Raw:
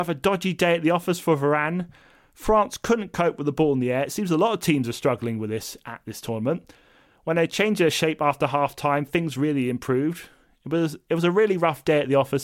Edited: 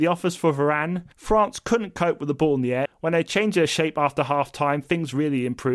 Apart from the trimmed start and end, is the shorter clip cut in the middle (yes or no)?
yes